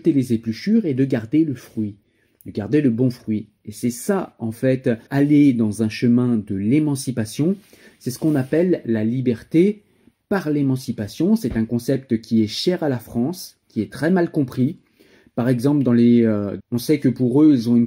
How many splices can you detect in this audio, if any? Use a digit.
2